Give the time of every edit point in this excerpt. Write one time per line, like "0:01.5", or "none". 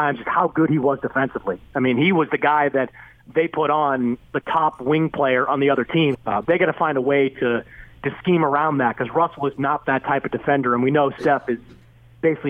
0:06.1

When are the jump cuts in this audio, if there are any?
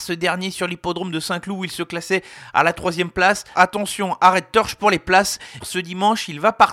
0:03.5
0:05.6

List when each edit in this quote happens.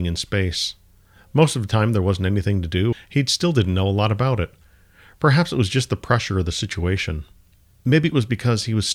0:02.9

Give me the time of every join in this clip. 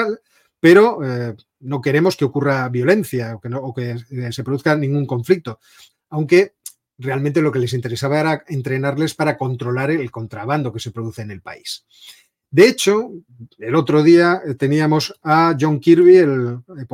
0:05.9

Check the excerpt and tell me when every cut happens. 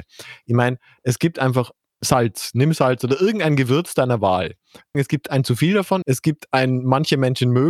0:04.9
0:06.0

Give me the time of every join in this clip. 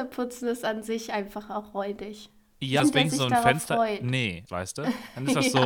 0:02.8
0:04.5

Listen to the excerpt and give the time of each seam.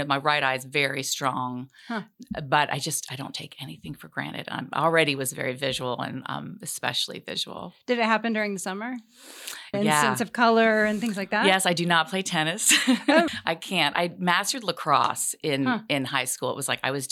0:09.7
0:13.3

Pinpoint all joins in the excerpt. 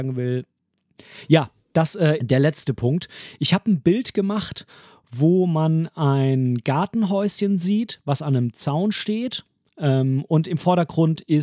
0:02.2

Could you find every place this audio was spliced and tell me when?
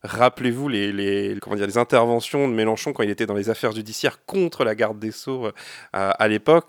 none

